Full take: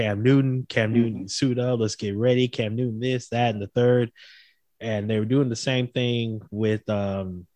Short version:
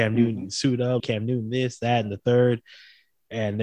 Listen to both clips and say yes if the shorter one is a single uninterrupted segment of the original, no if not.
no